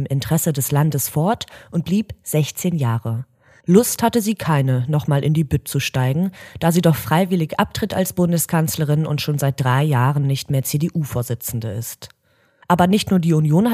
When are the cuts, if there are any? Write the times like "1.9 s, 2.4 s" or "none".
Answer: 3.6 s